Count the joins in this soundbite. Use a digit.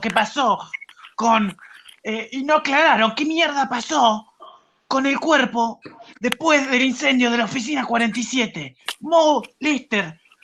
0